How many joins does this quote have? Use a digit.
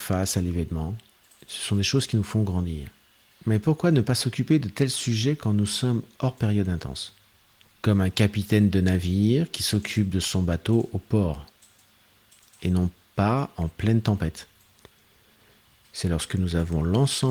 1